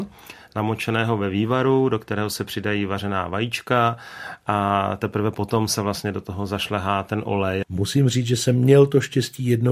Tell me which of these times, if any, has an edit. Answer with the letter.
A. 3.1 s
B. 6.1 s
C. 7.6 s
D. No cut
C